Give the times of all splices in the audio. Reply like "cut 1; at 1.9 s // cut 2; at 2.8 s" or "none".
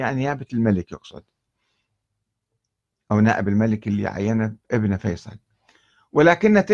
cut 1; at 4.6 s